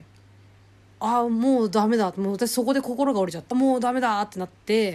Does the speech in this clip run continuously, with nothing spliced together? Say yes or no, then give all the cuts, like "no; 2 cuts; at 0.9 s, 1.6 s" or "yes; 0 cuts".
no; 1 cut; at 3.5 s